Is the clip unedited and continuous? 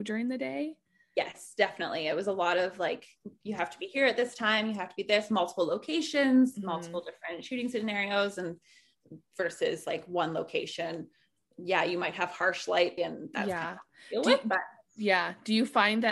no; 1 cut; at 13.0 s

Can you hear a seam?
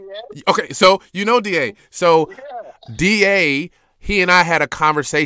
no; 0 cuts

